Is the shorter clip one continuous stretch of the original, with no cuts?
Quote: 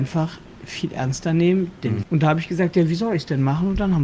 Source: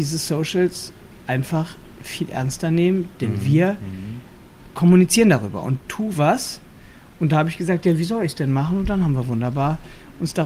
no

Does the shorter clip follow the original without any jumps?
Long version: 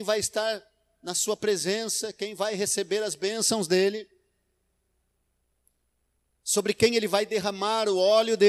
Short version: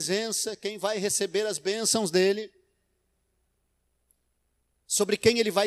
yes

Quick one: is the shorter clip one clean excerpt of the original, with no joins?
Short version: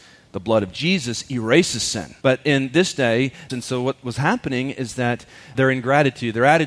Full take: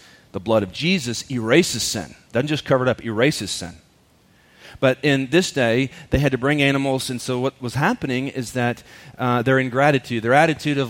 no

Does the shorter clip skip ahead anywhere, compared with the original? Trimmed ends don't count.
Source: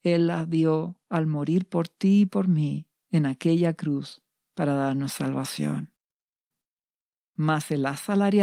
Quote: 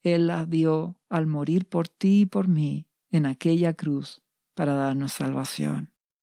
no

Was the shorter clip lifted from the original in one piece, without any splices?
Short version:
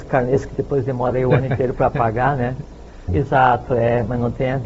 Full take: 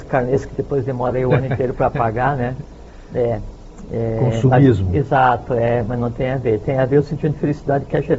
no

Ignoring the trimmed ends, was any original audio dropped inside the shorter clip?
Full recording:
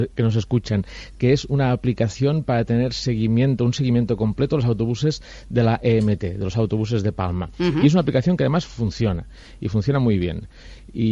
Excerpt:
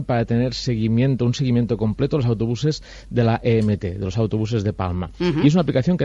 no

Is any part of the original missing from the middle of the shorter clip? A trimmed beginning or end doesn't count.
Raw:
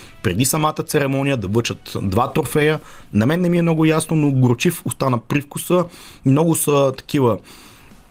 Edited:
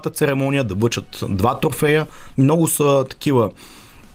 yes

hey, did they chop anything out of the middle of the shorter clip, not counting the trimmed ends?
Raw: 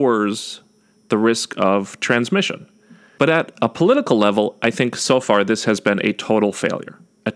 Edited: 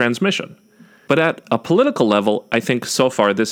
no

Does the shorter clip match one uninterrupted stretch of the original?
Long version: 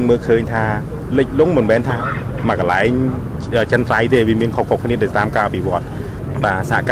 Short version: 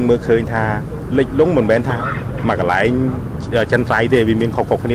yes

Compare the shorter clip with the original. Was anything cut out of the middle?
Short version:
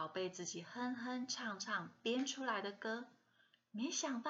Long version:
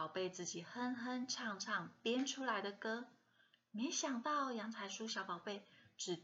no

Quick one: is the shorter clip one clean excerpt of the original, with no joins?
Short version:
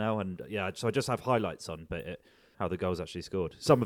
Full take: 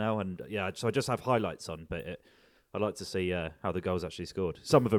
no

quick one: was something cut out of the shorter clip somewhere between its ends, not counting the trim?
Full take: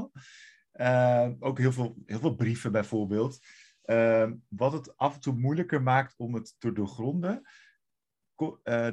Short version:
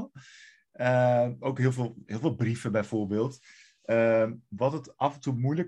no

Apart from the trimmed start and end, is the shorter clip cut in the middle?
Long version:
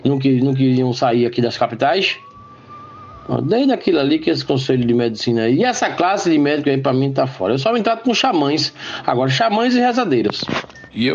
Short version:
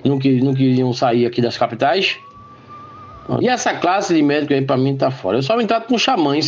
yes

